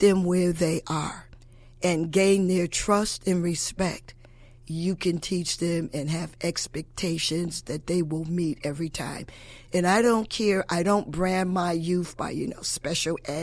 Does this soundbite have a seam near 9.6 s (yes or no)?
no